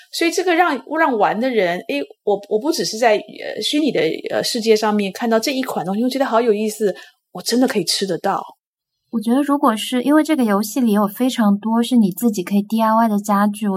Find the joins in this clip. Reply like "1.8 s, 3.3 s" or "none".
none